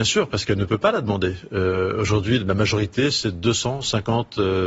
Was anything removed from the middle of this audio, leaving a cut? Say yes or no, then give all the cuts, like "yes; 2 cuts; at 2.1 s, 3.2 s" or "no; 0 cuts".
yes; 1 cut; at 2.4 s